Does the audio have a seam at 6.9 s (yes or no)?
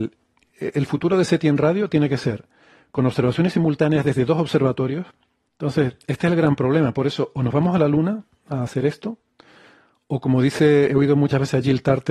no